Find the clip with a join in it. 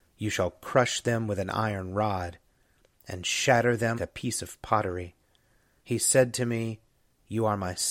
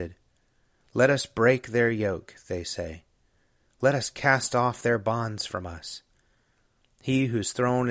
first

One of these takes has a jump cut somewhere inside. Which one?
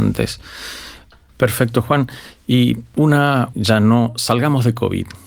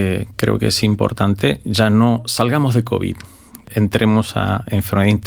first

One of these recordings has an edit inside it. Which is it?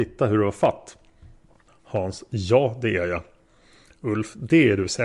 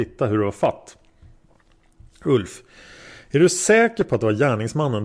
first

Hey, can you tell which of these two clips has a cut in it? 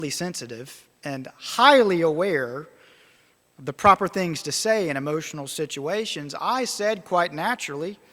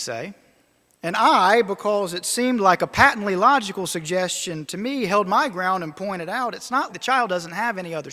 second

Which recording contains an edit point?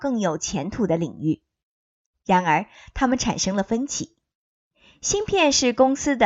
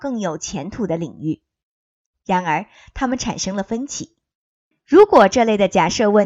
second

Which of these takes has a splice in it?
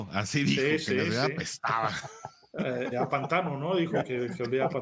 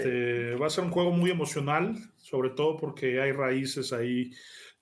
first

